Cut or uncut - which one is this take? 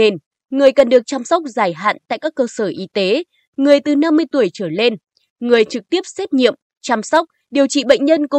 uncut